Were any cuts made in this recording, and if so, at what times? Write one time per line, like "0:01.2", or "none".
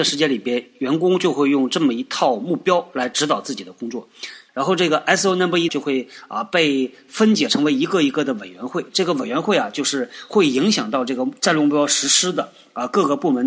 0:04.5
0:05.7